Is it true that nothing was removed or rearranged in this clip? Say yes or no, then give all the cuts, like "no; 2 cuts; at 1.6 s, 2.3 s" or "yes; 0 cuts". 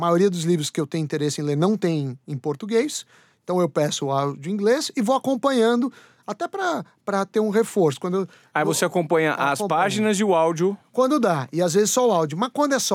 yes; 0 cuts